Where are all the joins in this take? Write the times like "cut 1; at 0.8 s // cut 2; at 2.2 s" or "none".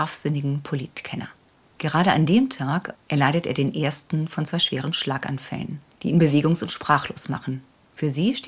cut 1; at 2.9 s